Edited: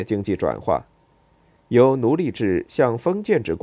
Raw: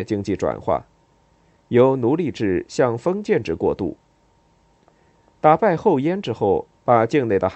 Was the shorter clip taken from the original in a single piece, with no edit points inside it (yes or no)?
yes